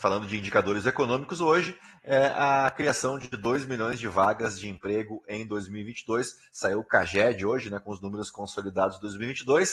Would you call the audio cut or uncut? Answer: uncut